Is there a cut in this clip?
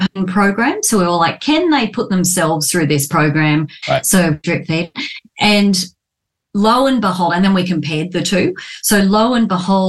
yes; 1 cut; at 3.8 s

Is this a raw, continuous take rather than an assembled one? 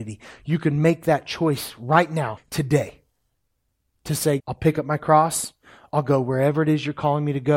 no; 2 cuts; at 2.4 s, 4.4 s

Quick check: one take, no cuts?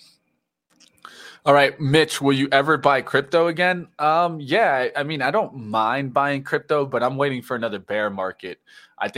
yes; 0 cuts

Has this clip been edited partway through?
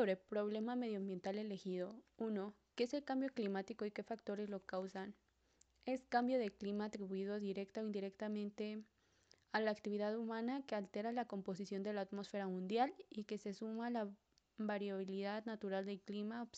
no; 0 cuts

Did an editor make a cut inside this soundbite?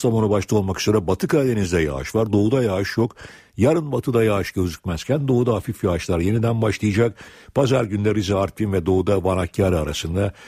no; 0 cuts

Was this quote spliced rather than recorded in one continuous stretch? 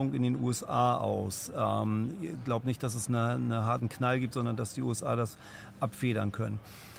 no; 0 cuts

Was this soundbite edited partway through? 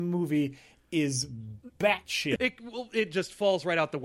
yes; 1 cut; at 2.4 s

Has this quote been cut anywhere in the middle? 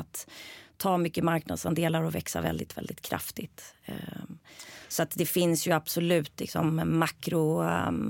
no; 0 cuts

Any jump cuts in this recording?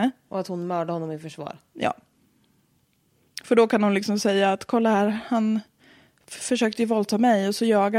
no; 0 cuts

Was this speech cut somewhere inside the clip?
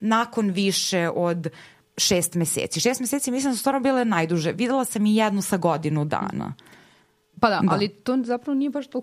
no; 0 cuts

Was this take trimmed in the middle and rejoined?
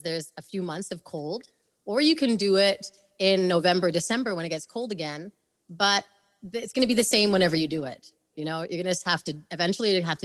no; 0 cuts

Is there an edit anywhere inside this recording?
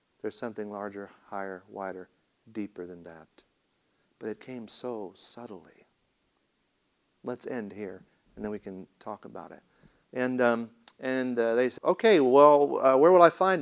yes; 2 cuts; at 10.1 s, 11.8 s

